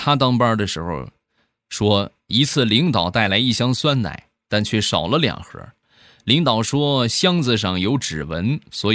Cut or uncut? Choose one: uncut